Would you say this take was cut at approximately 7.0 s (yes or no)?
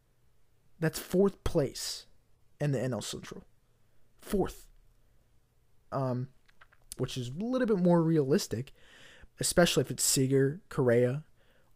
yes